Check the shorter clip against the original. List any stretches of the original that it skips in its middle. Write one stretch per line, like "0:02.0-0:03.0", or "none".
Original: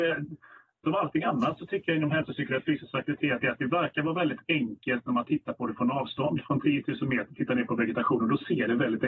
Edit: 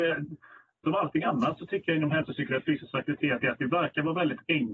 none